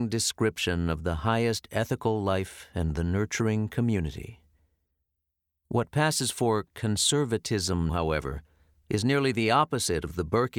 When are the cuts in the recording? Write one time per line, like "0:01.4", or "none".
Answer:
0:07.9